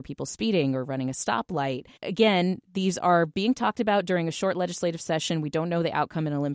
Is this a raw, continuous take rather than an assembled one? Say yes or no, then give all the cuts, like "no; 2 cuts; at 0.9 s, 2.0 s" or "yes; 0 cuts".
no; 1 cut; at 2.0 s